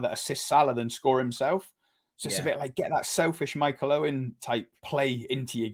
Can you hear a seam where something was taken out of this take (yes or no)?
yes